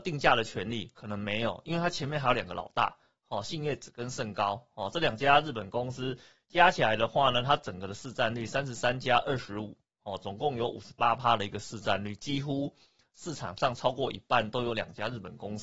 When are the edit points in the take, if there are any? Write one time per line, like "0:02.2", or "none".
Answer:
none

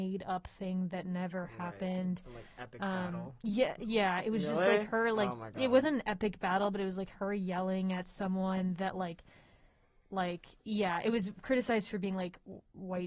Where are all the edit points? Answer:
0:10.6

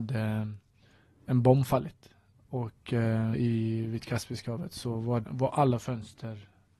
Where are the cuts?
0:03.3
0:05.2

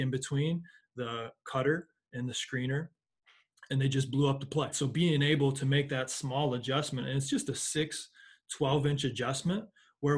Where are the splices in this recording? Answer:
0:04.7

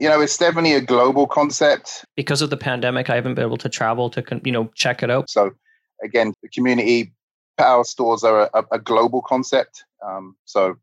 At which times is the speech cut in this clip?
0:02.1
0:05.3
0:06.3

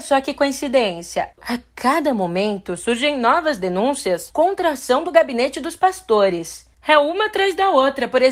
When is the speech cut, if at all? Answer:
none

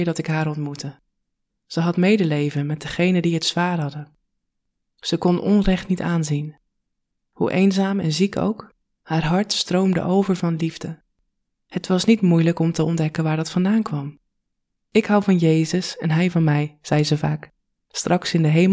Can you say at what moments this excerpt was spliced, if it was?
none

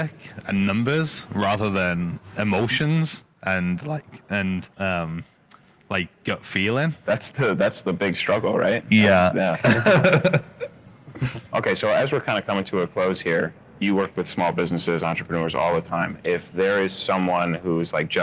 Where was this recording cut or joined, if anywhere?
0:04.7
0:11.5

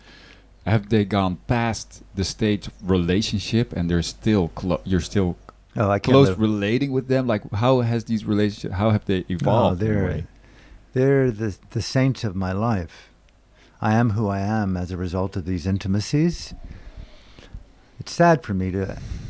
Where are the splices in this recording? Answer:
none

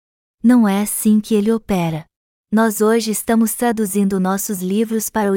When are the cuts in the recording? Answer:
0:02.4

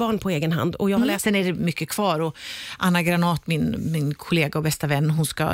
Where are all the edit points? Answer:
0:01.1

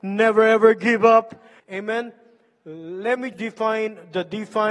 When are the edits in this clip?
0:01.6
0:03.3

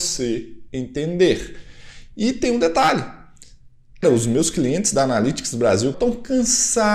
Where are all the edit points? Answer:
0:04.0
0:05.9

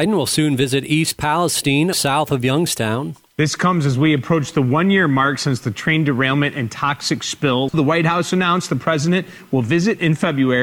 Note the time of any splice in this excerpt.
0:01.9

